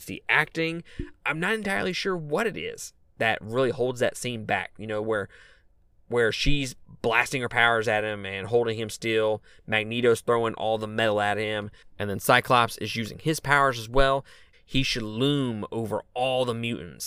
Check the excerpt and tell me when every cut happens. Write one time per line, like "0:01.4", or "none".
0:14.5